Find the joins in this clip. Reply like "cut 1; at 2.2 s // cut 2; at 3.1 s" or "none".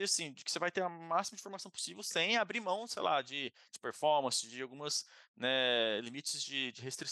none